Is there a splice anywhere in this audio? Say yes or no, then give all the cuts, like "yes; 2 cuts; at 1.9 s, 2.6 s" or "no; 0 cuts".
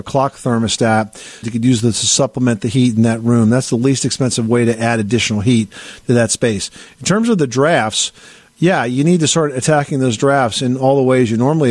yes; 1 cut; at 1.4 s